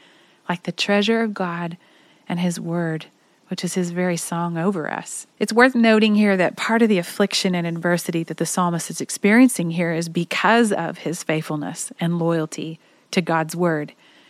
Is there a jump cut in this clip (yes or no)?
yes